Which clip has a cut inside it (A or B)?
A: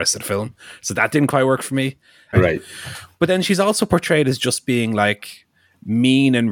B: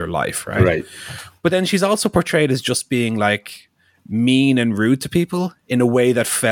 A